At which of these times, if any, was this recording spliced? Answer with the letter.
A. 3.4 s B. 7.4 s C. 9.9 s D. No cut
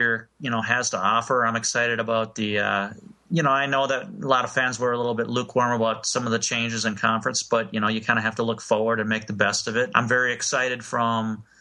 C